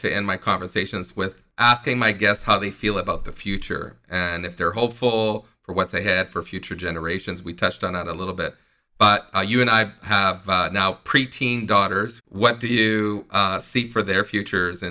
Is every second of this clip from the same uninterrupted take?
yes; 0 cuts

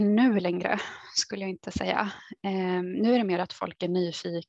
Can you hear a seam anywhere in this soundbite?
no; 0 cuts

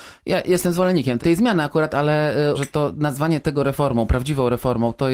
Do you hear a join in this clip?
yes; 2 cuts; at 1.2 s, 2.5 s

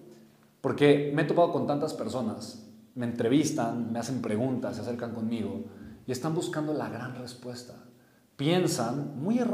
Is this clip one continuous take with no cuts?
yes; 0 cuts

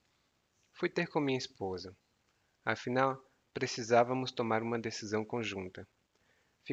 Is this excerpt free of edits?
yes; 0 cuts

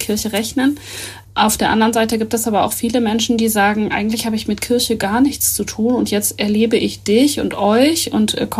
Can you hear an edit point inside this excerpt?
no; 0 cuts

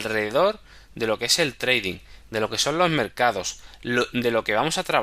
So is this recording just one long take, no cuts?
no; 1 cut; at 2.3 s

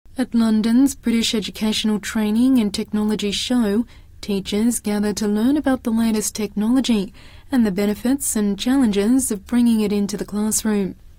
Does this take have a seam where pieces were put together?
no; 0 cuts

